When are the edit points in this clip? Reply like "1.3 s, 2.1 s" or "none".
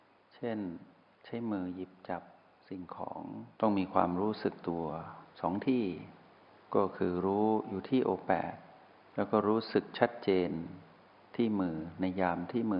3.5 s, 5.3 s